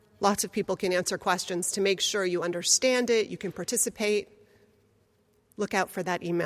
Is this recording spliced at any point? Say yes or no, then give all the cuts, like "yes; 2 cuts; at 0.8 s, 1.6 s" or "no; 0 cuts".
no; 0 cuts